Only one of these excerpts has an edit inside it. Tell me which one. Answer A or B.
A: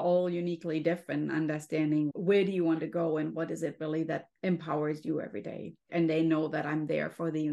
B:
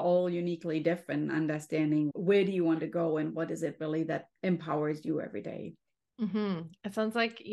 A